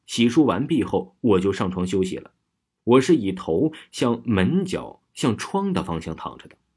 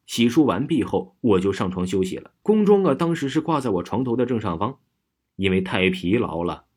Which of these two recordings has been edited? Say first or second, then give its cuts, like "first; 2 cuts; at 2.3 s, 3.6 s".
second; 1 cut; at 2.4 s